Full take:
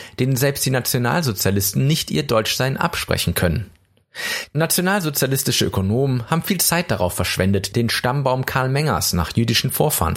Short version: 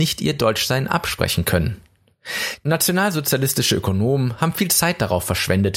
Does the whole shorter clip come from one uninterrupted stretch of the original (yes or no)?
yes